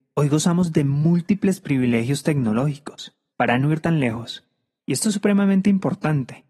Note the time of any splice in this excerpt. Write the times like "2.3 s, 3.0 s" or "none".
3.3 s, 4.8 s